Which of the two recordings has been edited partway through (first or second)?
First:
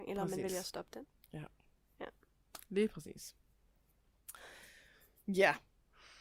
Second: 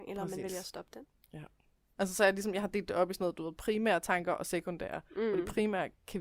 second